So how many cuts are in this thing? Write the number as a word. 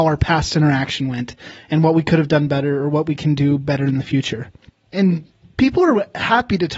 one